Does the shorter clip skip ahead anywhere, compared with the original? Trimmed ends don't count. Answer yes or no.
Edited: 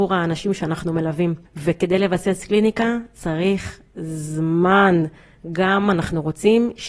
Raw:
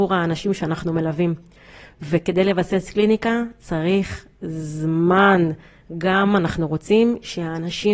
yes